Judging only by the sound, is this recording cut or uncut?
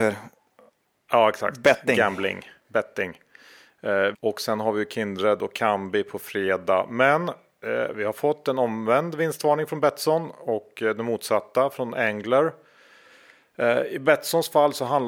cut